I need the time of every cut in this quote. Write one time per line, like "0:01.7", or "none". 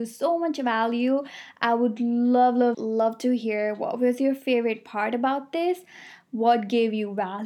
0:02.7